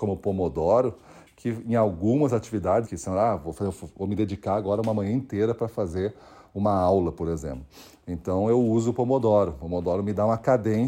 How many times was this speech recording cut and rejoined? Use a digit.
1